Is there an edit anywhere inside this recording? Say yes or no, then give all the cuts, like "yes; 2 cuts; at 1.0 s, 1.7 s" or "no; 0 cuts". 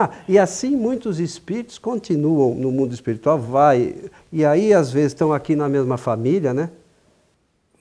yes; 1 cut; at 4.2 s